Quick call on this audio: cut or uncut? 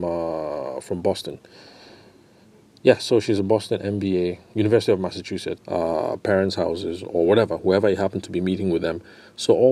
cut